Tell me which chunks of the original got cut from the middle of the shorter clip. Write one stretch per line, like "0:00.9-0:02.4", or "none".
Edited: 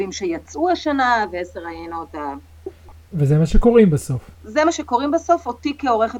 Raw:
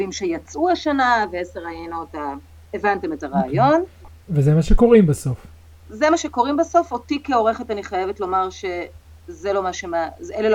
0:02.7-0:03.8
0:05.5-0:05.8

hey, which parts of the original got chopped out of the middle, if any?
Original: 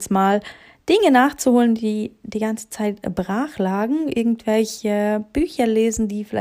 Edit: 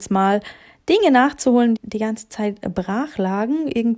0:01.8-0:02.2

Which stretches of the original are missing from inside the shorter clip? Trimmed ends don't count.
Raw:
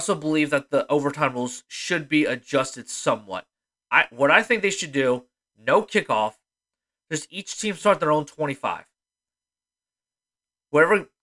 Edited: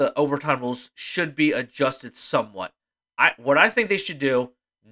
none

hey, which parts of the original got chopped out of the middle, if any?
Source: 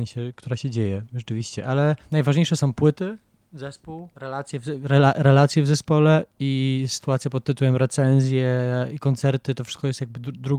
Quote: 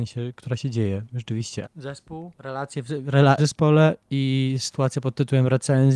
0:01.6-0:03.4
0:05.1-0:05.7

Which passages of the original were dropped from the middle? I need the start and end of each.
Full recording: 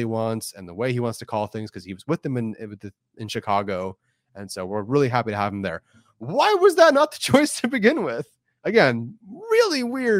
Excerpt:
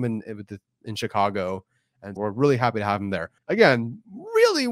0:04.5-0:04.7
0:05.9-0:08.5

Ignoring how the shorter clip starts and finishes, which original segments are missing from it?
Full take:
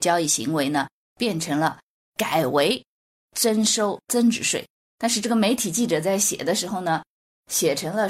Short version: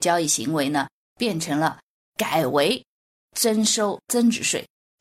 none

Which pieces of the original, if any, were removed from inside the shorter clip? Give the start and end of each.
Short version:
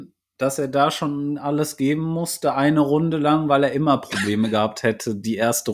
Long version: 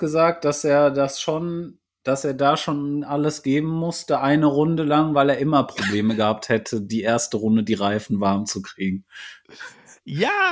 none

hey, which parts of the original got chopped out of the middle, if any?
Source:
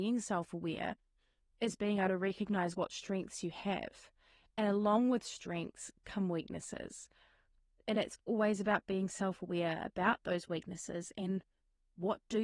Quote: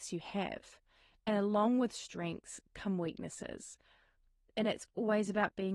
none

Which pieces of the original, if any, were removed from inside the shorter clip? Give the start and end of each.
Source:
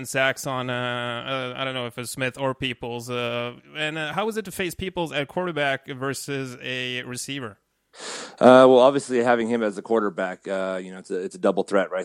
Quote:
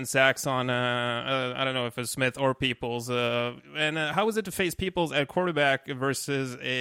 none

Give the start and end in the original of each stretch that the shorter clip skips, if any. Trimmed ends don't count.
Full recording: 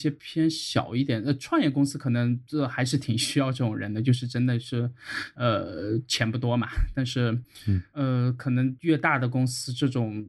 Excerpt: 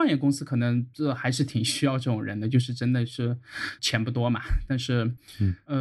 0:05.3-0:06.1

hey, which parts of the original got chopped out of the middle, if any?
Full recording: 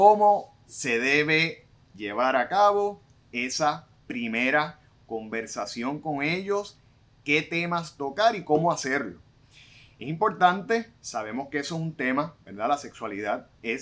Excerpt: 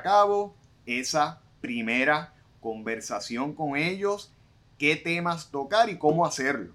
none

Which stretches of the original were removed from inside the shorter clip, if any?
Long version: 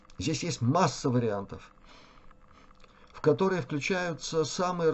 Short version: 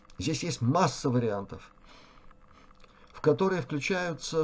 none

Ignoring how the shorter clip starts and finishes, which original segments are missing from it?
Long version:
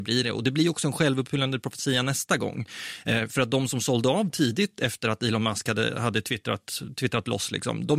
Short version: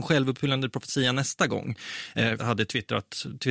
0:03.3-0:05.9

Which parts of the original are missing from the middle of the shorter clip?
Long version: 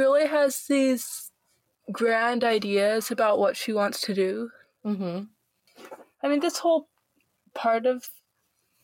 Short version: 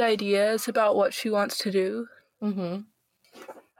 none

